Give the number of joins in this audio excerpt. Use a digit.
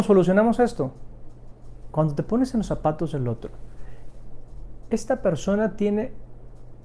1